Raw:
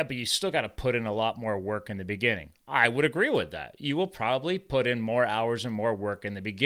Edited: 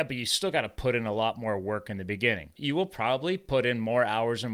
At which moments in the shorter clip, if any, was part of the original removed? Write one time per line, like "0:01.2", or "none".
0:02.5